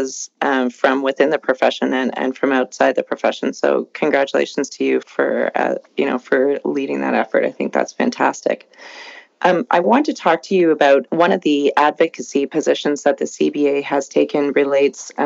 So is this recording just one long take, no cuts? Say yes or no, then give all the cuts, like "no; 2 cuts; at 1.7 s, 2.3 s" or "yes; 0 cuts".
no; 2 cuts; at 5.0 s, 11.1 s